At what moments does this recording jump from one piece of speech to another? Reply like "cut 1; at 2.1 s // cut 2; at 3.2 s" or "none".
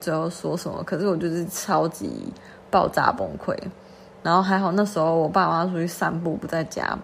none